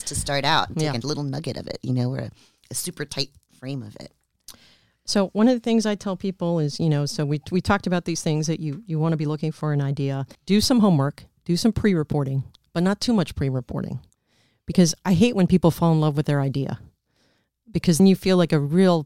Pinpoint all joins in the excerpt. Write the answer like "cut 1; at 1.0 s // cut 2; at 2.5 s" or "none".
cut 1; at 10.3 s // cut 2; at 18.0 s